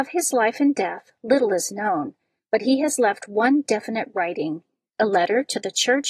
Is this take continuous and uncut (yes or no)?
yes